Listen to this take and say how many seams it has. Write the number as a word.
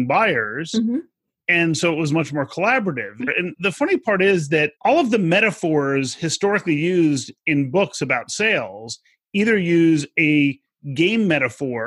two